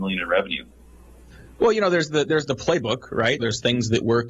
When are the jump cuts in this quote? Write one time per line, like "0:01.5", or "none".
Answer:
0:03.4